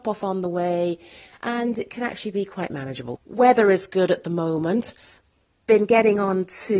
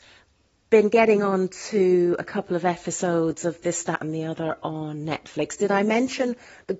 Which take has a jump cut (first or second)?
first